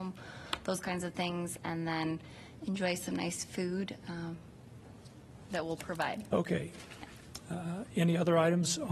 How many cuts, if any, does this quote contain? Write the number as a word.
one